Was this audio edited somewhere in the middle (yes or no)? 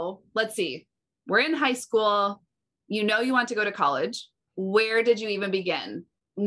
no